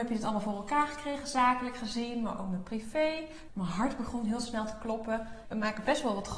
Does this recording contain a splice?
yes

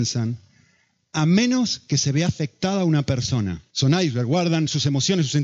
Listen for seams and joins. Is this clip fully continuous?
no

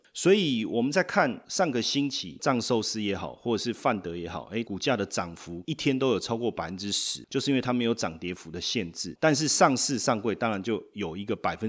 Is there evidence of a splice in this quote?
yes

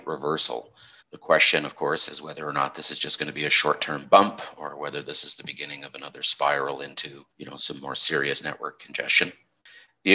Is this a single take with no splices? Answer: no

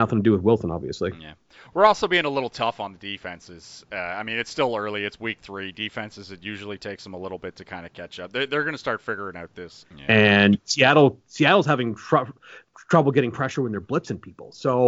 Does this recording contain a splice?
yes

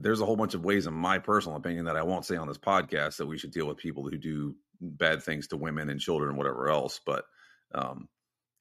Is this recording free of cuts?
yes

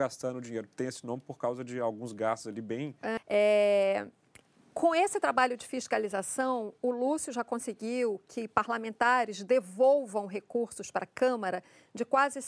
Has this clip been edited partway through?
yes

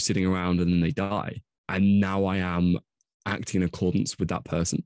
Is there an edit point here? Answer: yes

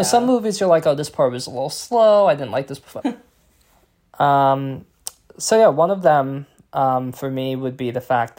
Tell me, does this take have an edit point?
yes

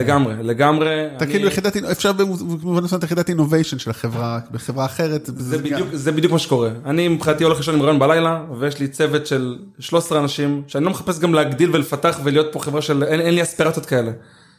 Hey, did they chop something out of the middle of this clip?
no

